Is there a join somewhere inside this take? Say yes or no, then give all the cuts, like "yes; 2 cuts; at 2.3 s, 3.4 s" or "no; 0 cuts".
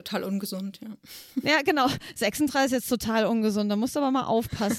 no; 0 cuts